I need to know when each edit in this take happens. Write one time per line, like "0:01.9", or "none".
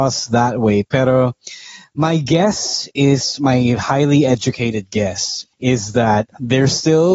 0:05.5

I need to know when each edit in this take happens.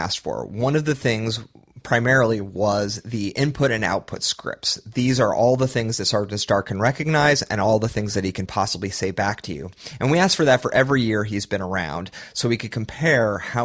none

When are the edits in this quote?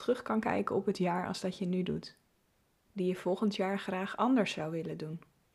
0:02.8

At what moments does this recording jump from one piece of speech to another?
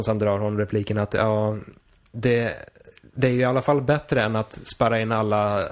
none

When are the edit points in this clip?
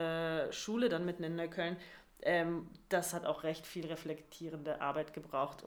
none

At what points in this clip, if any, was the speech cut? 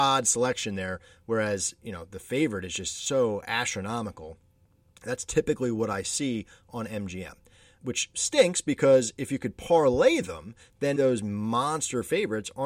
0:07.8
0:11.0

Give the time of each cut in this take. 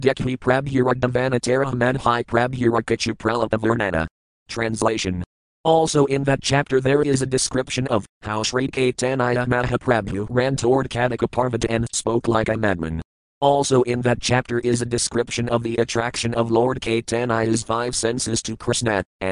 0:13.4

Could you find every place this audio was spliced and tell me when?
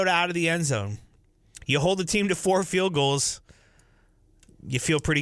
none

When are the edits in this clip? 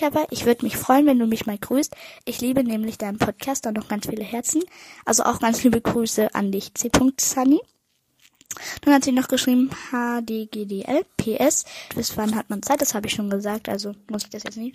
0:11.9

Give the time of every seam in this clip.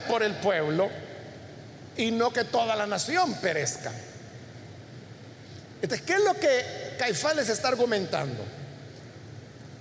0:05.8

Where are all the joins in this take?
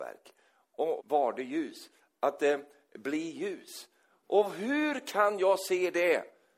0:01.0
0:04.2

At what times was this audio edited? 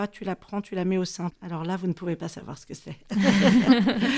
0:01.3

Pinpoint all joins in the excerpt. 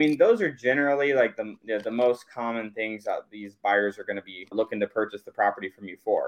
0:04.5

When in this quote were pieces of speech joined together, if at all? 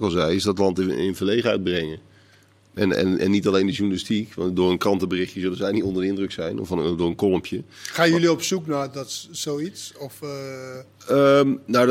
none

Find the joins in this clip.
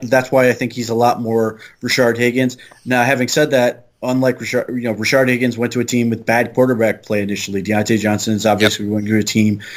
none

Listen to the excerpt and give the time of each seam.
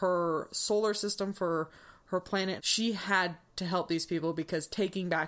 0:02.6

